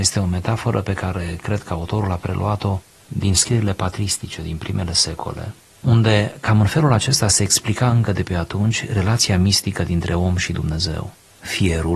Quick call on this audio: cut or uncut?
uncut